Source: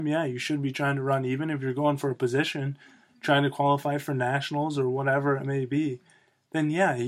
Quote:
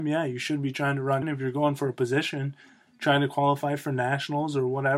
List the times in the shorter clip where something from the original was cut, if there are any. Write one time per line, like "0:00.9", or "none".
0:01.2